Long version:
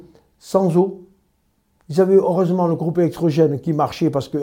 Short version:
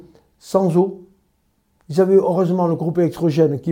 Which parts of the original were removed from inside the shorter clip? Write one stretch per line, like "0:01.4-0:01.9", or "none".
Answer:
none